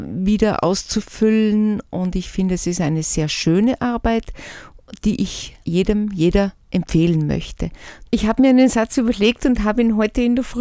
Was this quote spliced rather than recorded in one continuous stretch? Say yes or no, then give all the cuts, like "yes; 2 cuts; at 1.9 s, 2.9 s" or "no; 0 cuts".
yes; 2 cuts; at 5.6 s, 8.1 s